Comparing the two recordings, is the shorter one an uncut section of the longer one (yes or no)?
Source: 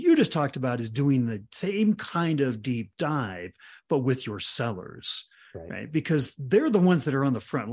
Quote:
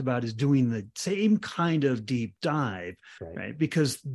no